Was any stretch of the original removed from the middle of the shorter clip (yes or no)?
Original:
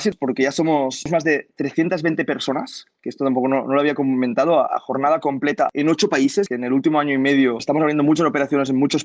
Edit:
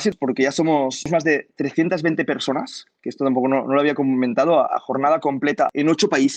no